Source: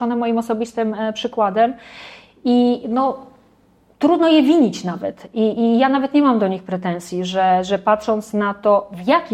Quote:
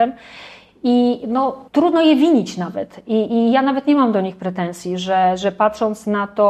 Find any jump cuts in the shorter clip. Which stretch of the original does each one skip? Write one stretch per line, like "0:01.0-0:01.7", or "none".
0:03.3-0:03.9